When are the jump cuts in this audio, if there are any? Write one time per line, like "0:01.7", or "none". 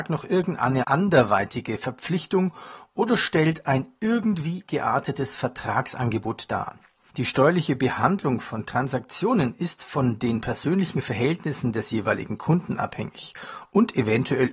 0:07.1